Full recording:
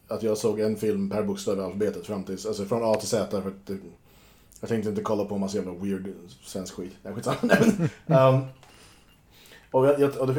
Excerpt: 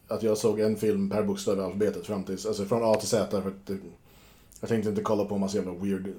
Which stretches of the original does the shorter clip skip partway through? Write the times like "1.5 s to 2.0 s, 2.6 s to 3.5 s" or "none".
none